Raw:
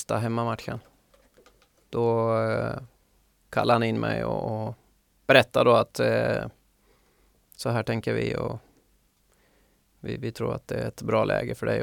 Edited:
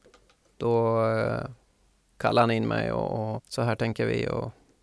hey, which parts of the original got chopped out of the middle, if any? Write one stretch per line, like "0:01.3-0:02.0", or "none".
0:04.7-0:07.4